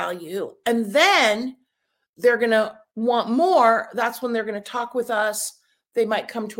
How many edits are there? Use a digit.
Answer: 0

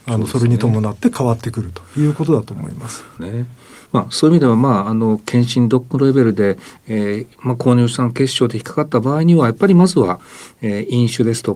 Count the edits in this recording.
1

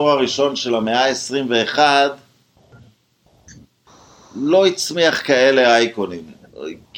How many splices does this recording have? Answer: 0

